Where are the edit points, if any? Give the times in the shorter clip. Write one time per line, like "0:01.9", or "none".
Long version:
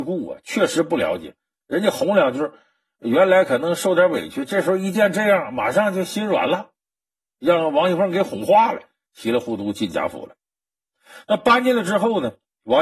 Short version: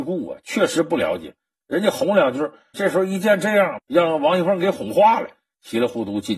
0:02.7
0:03.8